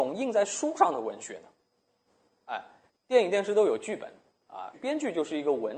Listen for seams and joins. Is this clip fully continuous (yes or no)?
no